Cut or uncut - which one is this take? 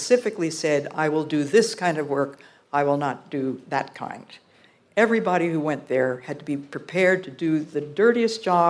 uncut